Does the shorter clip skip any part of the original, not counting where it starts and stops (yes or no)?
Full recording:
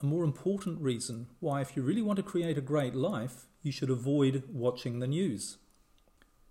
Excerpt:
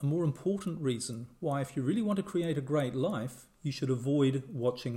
no